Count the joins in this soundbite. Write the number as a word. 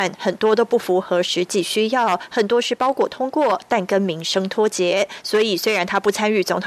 zero